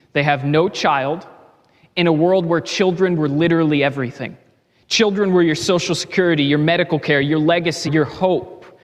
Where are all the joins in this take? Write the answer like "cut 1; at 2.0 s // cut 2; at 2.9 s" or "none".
cut 1; at 7.9 s